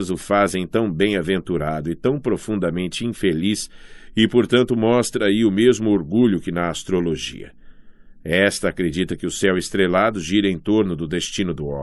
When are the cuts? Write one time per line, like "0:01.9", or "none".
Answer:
none

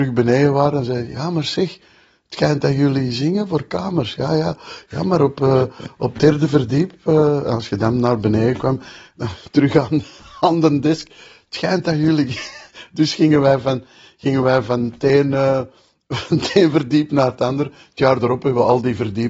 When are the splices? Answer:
none

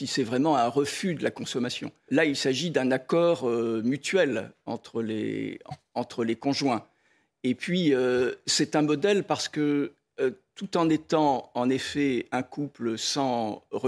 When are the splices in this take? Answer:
0:02.1

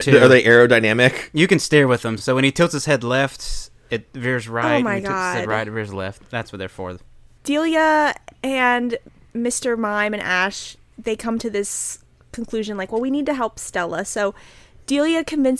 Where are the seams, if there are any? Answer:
none

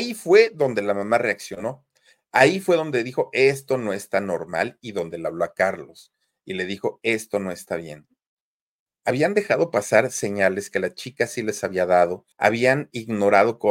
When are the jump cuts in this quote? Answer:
0:08.9
0:12.3

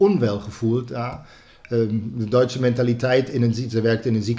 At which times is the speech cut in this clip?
none

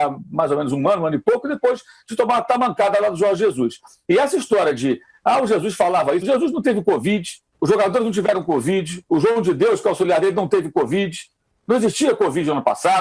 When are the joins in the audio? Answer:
0:06.2
0:07.5

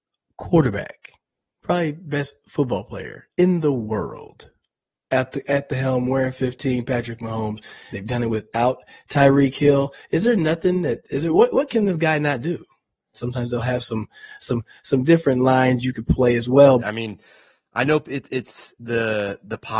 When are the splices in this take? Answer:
0:07.9
0:13.1
0:16.8

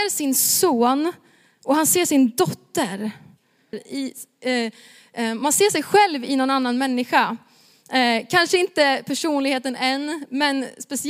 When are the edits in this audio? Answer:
0:03.7

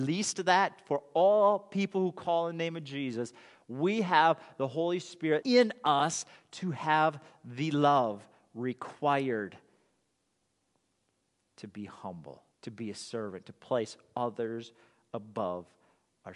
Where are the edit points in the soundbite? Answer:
0:05.4
0:12.5

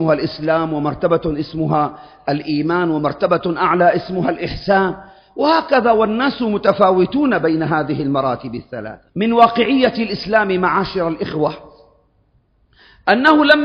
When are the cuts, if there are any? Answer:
0:09.1

